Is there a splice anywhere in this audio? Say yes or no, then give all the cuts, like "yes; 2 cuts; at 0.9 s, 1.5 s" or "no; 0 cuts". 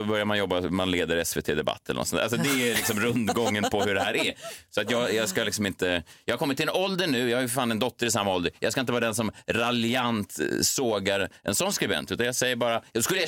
no; 0 cuts